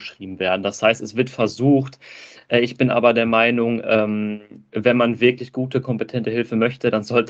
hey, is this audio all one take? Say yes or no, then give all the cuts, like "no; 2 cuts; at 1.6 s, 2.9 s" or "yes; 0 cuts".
yes; 0 cuts